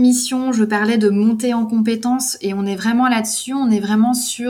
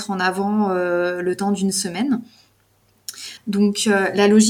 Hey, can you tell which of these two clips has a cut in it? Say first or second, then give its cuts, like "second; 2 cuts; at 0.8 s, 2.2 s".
second; 1 cut; at 3.4 s